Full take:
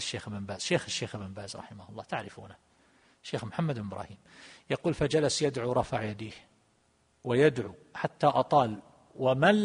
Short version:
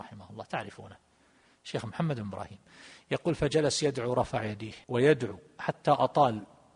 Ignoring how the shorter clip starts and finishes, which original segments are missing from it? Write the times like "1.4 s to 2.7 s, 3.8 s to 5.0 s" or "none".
6.4 s to 7.2 s

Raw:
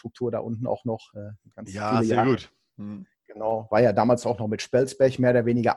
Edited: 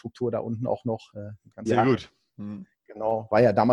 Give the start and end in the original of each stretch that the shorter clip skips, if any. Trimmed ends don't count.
1.7 s to 2.1 s

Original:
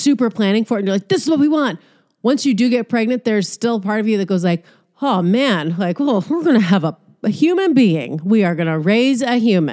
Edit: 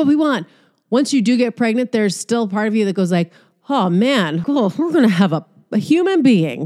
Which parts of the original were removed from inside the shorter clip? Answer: 5.8 s to 6.0 s

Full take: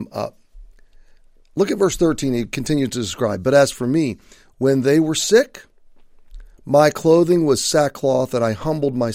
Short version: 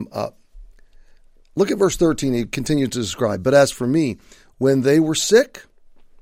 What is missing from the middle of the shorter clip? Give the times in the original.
none

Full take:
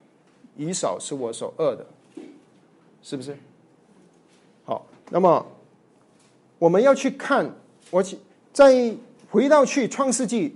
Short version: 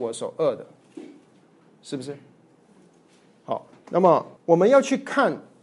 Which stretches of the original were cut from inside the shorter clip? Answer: 5.6 s to 6.5 s

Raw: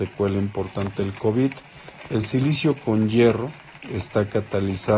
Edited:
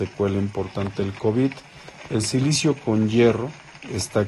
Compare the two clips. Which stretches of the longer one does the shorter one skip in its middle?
none

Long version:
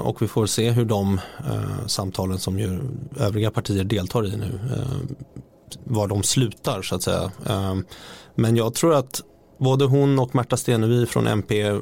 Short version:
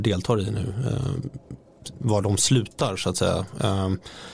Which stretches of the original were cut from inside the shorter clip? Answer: none

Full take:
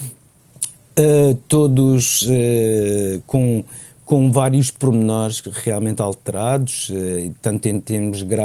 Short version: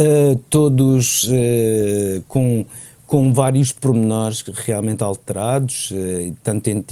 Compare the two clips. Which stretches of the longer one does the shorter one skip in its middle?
none

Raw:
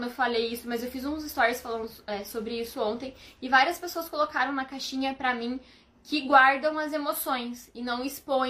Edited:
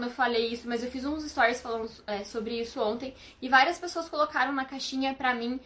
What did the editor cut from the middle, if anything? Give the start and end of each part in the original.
none

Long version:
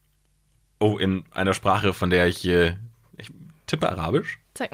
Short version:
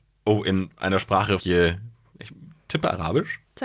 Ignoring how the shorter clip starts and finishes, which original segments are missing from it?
1.9 s to 2.4 s

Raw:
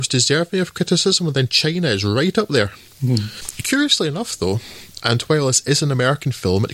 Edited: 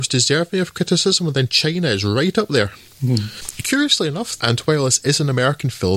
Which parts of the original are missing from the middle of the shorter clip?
4.4 s to 5.0 s

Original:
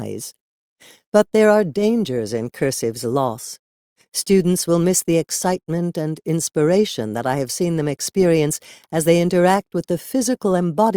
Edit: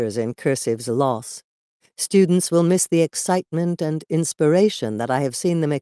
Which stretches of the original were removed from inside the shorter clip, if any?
none

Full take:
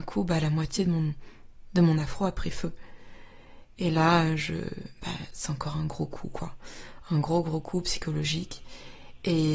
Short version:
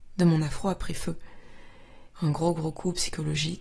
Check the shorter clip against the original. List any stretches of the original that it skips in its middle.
3.7 s to 7.0 s

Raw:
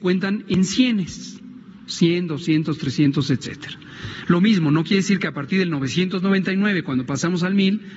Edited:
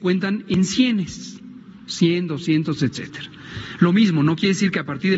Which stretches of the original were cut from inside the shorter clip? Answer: 2.8 s to 3.2 s

